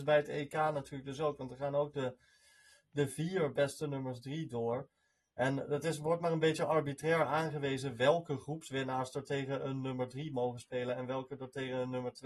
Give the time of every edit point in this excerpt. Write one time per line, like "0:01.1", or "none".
none